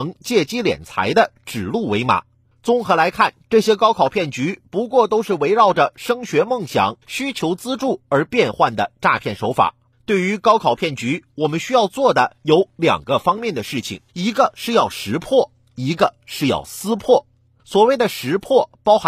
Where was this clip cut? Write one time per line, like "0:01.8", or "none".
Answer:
0:07.0
0:14.1

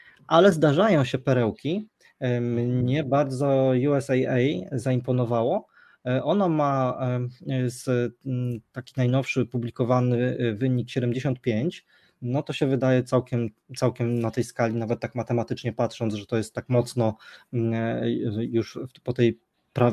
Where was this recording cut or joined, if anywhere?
none

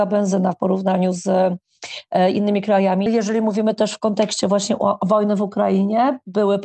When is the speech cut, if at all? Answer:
0:03.1

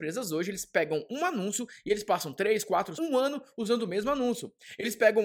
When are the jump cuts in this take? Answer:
0:02.9

